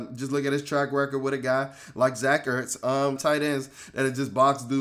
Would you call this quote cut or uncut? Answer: cut